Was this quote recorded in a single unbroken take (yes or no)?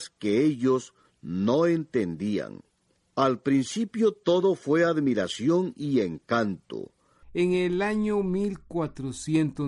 no